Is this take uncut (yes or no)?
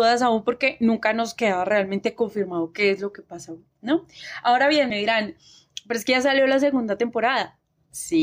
yes